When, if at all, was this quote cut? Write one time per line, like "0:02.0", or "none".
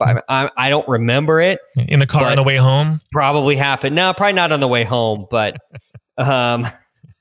none